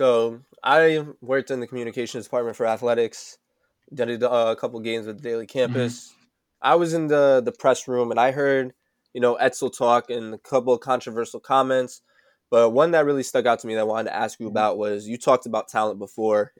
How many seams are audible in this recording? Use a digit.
0